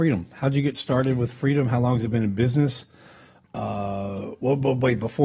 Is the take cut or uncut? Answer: uncut